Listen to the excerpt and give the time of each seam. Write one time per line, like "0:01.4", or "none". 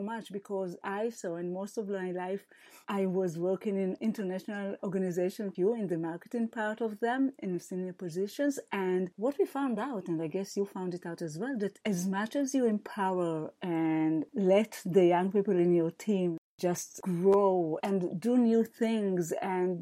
0:02.8
0:05.5